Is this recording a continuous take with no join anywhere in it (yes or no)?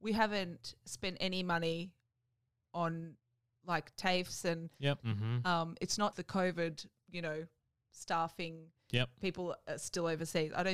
no